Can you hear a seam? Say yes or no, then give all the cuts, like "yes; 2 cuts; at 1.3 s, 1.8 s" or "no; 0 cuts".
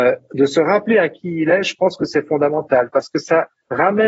no; 0 cuts